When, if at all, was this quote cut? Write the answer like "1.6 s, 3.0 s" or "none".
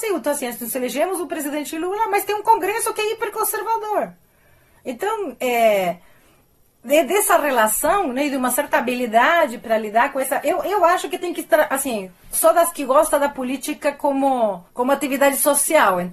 12.3 s, 14.7 s